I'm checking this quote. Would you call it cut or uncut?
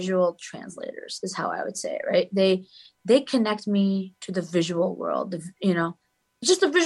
uncut